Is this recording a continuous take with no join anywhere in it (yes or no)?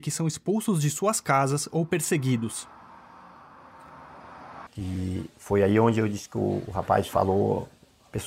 no